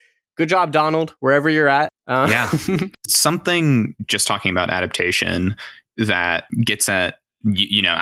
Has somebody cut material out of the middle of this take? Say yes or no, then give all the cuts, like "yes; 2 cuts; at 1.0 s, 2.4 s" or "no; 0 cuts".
no; 0 cuts